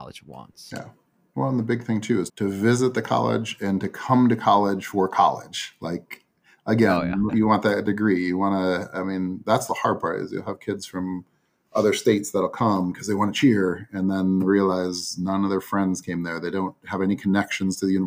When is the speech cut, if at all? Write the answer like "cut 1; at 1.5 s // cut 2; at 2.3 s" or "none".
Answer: cut 1; at 2.3 s // cut 2; at 7.3 s